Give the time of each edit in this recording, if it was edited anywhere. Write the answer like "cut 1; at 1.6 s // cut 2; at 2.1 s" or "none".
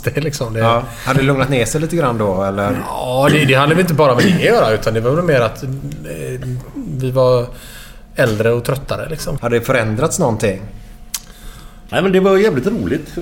cut 1; at 9.4 s // cut 2; at 11.9 s